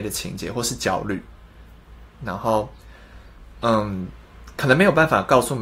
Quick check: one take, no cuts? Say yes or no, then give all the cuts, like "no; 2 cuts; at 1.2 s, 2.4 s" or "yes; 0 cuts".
yes; 0 cuts